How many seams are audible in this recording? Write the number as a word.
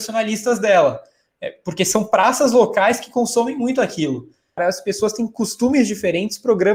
one